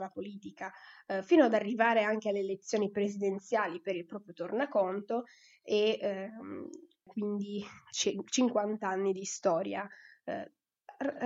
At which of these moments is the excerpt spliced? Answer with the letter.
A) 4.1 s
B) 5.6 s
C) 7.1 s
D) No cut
C